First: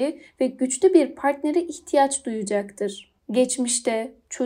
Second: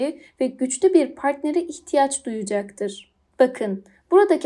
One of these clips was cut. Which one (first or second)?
first